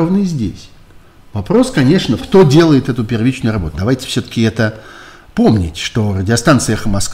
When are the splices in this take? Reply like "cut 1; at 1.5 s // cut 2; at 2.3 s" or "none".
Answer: cut 1; at 2.2 s // cut 2; at 3.7 s